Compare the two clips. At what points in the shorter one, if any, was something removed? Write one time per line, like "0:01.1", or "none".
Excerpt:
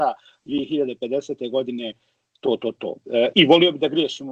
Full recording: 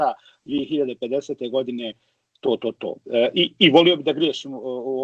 0:03.3

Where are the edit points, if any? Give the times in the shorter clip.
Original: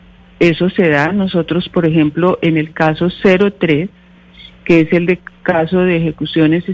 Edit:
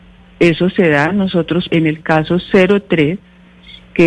0:01.7

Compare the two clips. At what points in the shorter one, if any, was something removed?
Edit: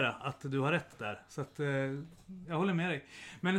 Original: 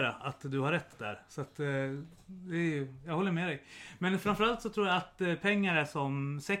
0:02.4

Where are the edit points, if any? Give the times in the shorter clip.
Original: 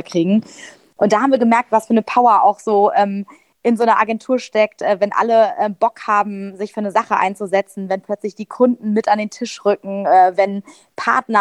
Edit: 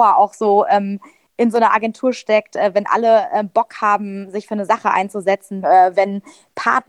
0:05.6

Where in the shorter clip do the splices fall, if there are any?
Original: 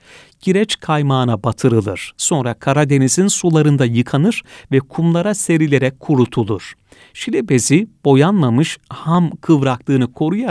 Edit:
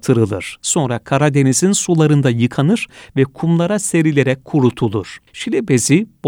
0:05.3

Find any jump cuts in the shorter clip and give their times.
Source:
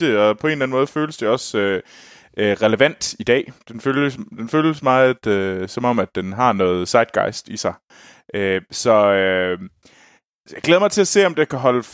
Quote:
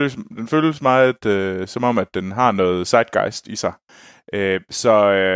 none

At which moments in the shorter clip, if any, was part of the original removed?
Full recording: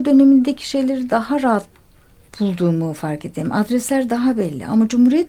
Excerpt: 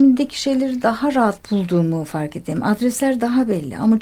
0:01.4

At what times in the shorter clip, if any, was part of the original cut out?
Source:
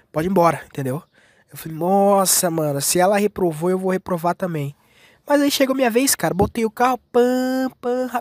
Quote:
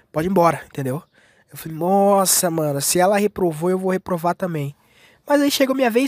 none

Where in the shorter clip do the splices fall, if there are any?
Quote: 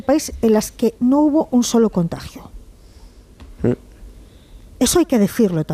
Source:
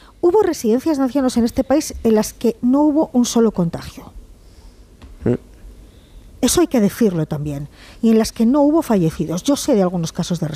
none

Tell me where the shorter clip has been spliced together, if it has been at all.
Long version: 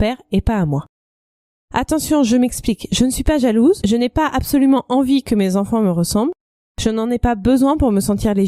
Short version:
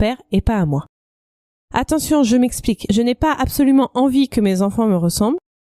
0:02.9

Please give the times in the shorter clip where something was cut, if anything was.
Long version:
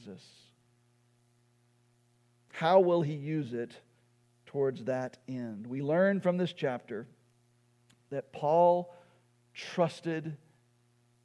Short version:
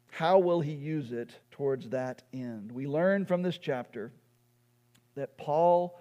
0:01.4

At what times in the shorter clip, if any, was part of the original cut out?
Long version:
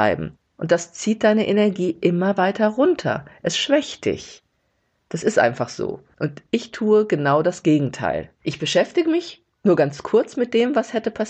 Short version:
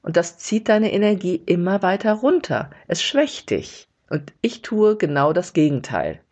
0:04.0

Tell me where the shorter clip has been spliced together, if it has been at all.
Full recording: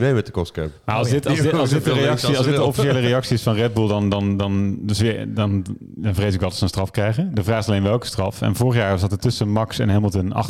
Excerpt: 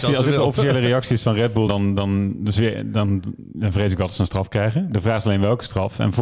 0:01.7

